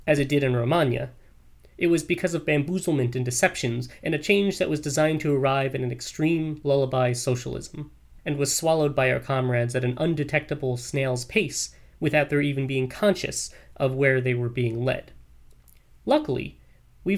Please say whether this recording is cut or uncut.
uncut